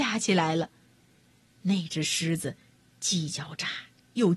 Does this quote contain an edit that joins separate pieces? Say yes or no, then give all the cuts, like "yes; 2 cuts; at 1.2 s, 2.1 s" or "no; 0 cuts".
yes; 1 cut; at 1.5 s